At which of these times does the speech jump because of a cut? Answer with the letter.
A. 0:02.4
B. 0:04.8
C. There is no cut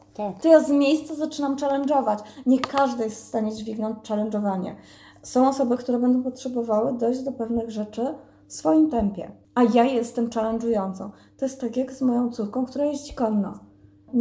C